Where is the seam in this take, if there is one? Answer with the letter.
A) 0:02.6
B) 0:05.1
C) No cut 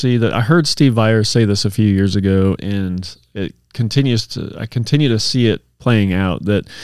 A